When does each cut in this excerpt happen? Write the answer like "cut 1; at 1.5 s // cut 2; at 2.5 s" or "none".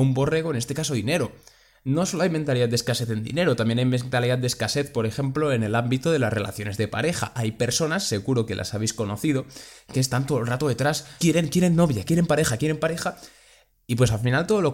cut 1; at 11.2 s // cut 2; at 12.6 s